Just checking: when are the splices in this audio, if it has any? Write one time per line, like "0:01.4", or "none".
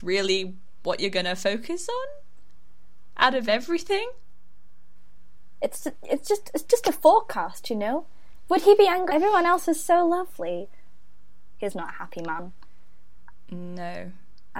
0:09.1
0:11.6

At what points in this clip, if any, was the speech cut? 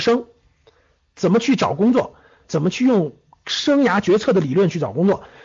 0:02.4

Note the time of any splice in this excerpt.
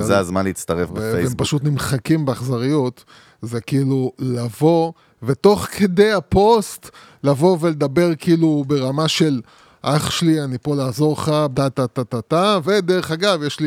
0:11.5
0:12.6

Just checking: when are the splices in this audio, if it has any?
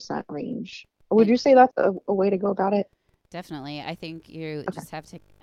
0:01.7

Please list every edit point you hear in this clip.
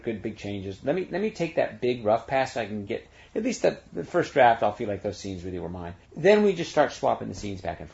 0:06.0

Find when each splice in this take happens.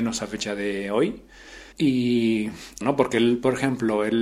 0:01.7
0:02.8

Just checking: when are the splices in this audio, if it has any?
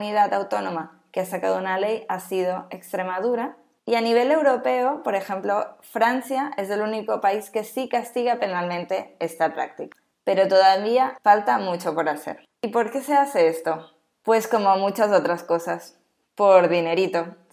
0:11.2

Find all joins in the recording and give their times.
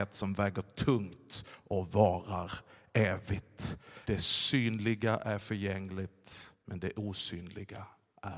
0:04.0
0:06.6

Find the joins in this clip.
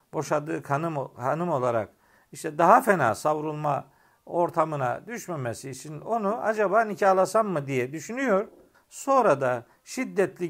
0:08.7

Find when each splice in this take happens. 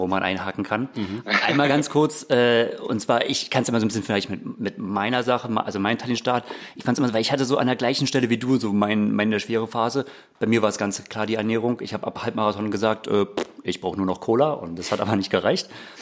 none

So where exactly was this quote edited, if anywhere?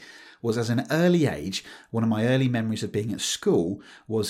none

